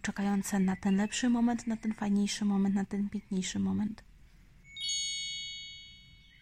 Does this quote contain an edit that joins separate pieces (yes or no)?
no